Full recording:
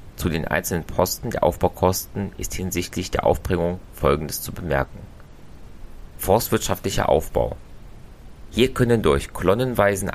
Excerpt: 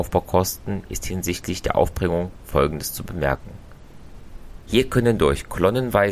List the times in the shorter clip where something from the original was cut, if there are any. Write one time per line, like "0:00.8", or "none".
0:04.6